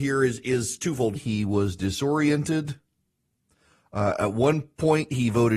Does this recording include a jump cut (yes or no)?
yes